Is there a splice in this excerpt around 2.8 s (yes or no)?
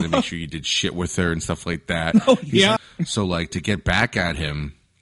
yes